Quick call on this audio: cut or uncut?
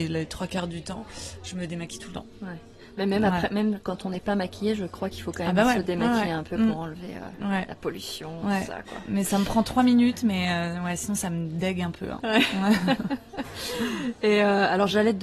uncut